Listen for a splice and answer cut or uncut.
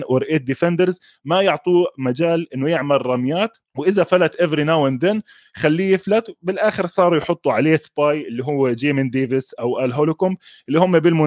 cut